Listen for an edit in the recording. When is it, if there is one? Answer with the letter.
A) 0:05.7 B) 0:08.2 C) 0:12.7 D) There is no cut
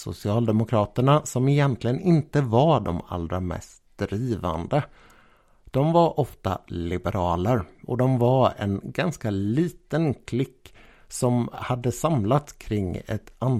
D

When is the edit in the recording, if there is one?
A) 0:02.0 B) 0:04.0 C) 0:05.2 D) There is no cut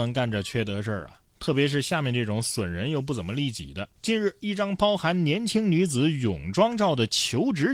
B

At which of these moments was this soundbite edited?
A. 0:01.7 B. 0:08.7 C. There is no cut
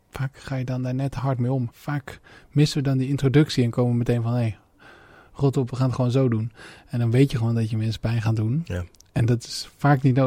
A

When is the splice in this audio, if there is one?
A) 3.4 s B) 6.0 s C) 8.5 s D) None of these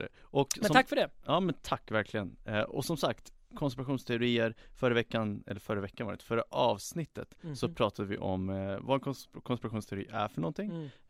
D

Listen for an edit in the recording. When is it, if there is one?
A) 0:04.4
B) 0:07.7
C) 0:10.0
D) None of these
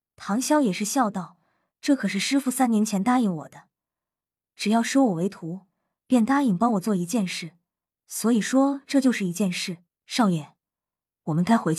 C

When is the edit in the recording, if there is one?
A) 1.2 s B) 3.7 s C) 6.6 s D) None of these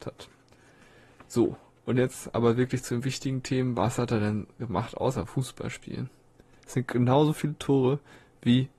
C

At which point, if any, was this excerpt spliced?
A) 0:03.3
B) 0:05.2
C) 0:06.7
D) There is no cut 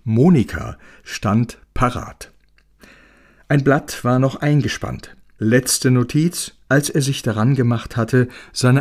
C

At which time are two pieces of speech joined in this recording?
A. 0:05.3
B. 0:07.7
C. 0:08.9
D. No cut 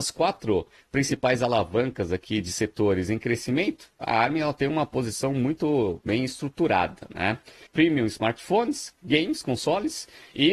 B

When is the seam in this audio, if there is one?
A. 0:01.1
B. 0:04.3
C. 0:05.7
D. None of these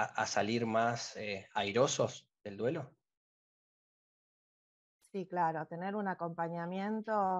D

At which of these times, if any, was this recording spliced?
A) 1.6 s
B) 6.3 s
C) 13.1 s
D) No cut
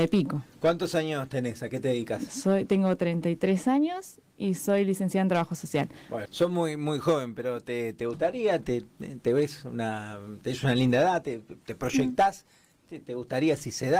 B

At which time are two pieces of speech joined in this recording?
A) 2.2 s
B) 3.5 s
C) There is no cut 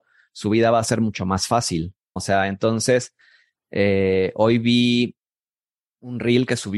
A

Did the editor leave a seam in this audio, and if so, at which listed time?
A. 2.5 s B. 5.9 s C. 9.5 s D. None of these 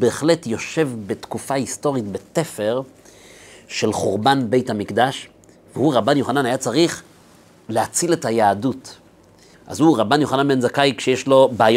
C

